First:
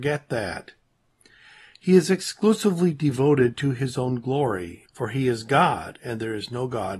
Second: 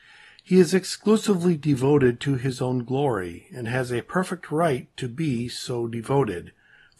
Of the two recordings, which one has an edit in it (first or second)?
first